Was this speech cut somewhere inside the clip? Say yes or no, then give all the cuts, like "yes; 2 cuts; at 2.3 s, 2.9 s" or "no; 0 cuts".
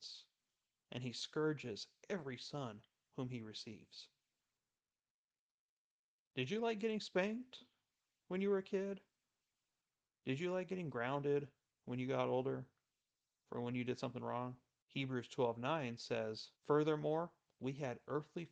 yes; 2 cuts; at 14.8 s, 16.6 s